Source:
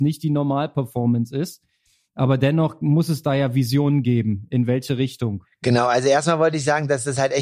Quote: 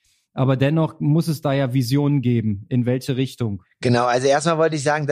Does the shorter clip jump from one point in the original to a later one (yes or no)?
no